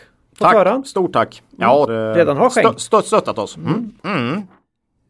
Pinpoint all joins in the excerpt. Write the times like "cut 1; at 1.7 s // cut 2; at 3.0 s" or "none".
cut 1; at 1.9 s // cut 2; at 4.0 s